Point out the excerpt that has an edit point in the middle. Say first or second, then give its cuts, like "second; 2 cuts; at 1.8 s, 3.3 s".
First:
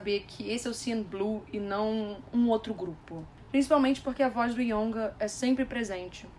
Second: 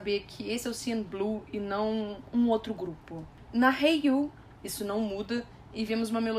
second; 1 cut; at 3.5 s